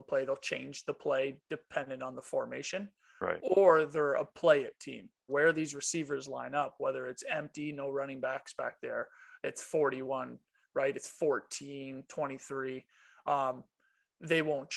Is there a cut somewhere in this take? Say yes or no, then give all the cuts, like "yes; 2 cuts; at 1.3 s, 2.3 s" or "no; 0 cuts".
yes; 1 cut; at 5.3 s